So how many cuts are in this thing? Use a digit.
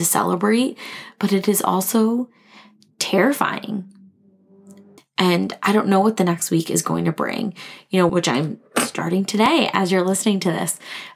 2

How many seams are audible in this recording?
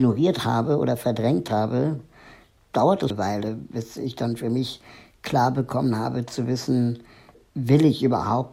1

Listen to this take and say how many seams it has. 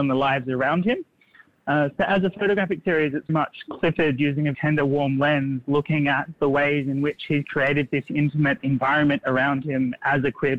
2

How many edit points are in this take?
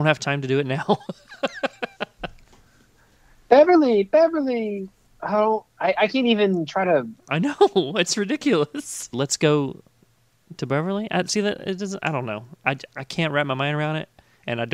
1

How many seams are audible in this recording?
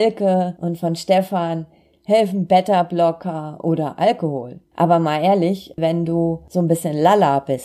2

